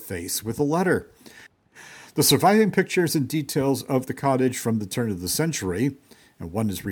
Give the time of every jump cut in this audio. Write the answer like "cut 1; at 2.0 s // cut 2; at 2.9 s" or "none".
cut 1; at 1.5 s